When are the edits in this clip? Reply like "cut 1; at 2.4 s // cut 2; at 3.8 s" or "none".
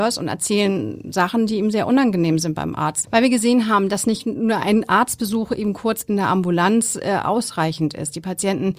cut 1; at 3.0 s